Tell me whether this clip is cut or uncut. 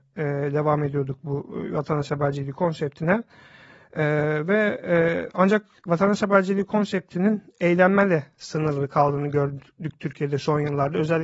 uncut